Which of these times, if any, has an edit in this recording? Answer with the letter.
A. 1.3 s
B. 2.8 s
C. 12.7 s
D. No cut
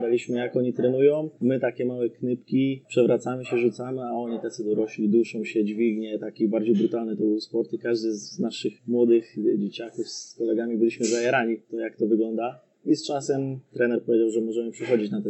D